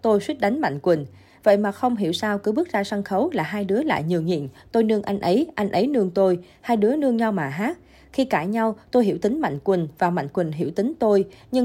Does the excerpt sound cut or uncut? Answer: uncut